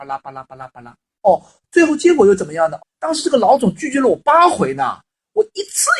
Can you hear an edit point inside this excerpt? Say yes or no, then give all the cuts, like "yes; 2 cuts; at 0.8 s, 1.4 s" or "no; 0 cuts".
yes; 2 cuts; at 1.2 s, 2.8 s